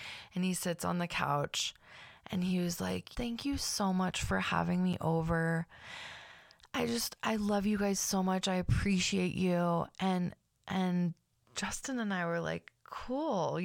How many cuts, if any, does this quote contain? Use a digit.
1